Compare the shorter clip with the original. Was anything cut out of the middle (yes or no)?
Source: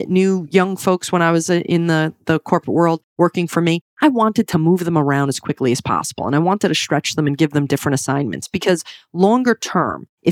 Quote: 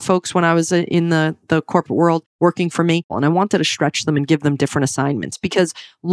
yes